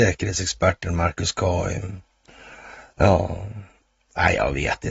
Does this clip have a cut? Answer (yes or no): no